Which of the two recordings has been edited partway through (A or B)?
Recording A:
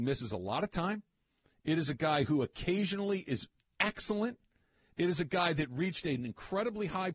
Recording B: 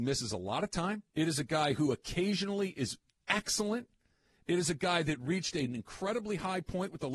B